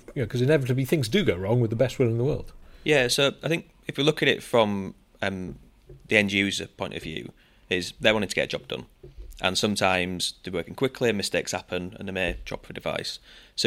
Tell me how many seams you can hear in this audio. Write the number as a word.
zero